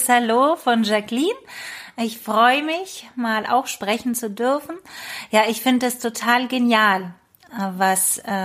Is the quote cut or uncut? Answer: uncut